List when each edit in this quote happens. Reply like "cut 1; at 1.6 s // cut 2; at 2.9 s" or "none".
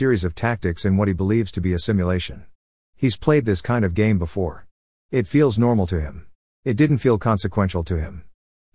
cut 1; at 6.6 s